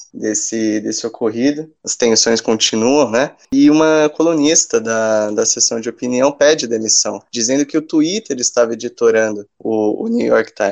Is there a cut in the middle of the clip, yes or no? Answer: no